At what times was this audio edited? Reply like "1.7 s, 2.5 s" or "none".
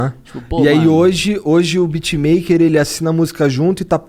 none